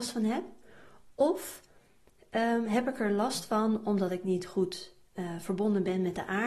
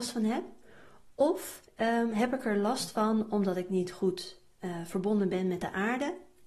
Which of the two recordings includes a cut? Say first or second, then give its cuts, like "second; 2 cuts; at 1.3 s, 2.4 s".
second; 1 cut; at 1.7 s